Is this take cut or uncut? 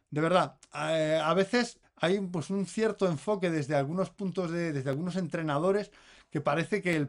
cut